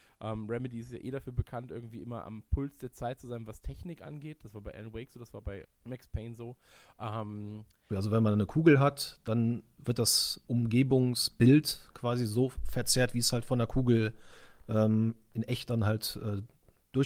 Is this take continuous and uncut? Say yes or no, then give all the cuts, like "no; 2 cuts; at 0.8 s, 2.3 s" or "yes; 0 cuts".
no; 3 cuts; at 5.6 s, 7.9 s, 10.4 s